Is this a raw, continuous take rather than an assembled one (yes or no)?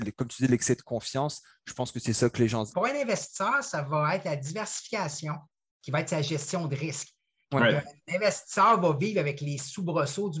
no